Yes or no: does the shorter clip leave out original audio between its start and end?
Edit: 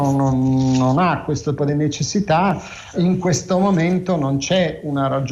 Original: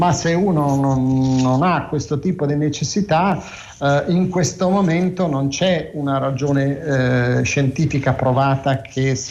yes